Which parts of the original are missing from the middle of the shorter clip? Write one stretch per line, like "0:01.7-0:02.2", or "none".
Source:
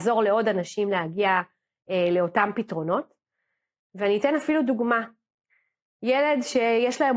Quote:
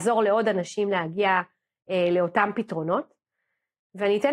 none